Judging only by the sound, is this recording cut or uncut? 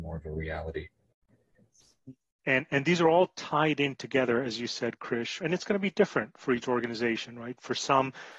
cut